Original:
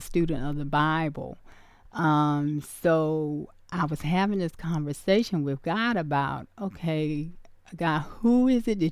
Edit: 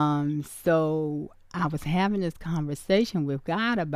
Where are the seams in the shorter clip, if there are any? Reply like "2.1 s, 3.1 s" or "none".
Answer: none